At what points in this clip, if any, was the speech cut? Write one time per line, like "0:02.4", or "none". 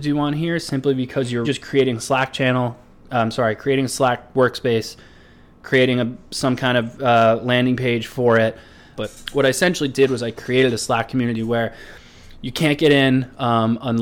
0:01.4
0:08.9